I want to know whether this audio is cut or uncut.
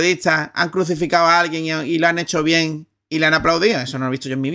uncut